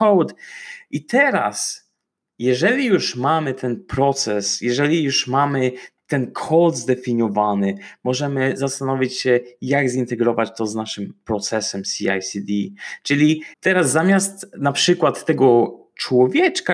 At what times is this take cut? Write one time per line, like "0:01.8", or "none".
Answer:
0:13.5